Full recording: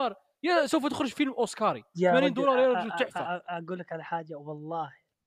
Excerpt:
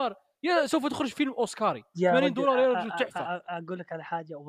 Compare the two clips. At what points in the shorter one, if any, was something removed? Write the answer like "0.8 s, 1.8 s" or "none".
none